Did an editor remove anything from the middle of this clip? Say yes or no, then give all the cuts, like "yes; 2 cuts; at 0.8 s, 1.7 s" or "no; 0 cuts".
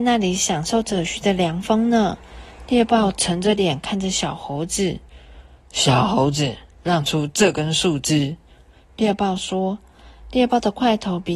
yes; 1 cut; at 1.1 s